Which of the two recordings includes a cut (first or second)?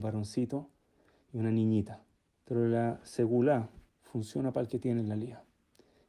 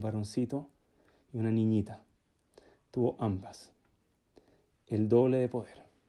first